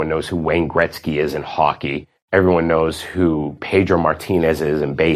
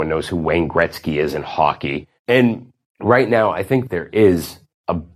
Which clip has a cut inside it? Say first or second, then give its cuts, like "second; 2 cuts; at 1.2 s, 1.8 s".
second; 1 cut; at 2.2 s